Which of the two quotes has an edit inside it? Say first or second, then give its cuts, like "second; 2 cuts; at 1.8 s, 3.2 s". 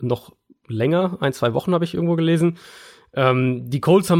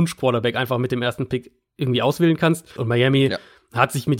second; 1 cut; at 2.8 s